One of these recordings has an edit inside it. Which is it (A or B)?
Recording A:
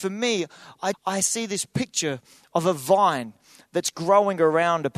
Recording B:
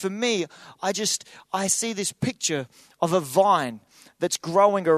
A